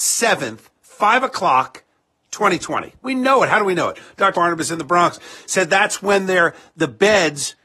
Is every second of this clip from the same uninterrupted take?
no; 2 cuts; at 3.0 s, 4.3 s

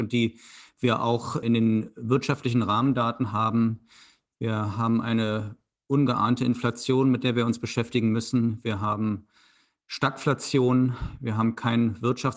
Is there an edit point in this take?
yes; 1 cut; at 1.4 s

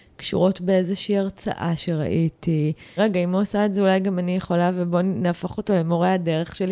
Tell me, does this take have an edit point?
yes; 1 cut; at 3.0 s

